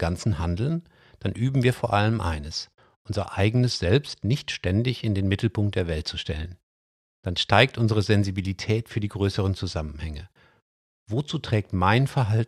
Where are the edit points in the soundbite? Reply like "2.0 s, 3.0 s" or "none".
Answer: none